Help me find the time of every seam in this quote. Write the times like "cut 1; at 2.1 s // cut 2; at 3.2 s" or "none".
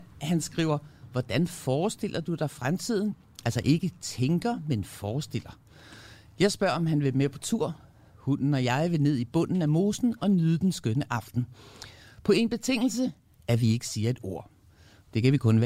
none